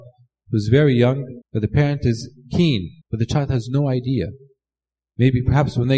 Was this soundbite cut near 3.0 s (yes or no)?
yes